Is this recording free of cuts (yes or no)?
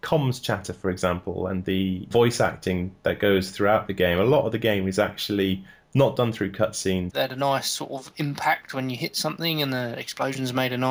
no